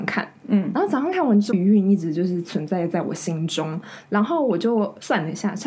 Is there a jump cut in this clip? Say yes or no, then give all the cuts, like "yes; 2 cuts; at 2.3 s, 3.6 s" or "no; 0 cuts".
yes; 1 cut; at 1.5 s